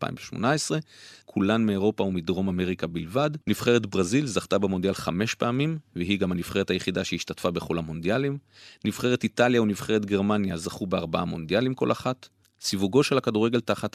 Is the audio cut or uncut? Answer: cut